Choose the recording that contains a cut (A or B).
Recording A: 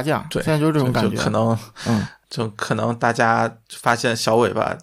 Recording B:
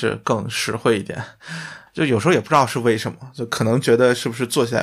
B